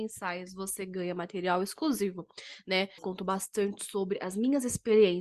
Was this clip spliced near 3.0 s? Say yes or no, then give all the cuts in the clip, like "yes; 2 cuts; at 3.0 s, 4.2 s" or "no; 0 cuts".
yes; 1 cut; at 3.0 s